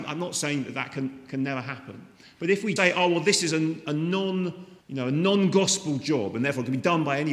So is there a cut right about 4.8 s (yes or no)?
yes